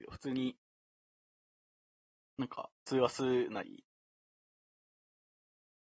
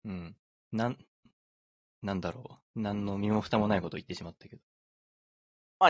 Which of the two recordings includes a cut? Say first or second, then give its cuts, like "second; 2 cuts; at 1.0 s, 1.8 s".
first; 1 cut; at 2.8 s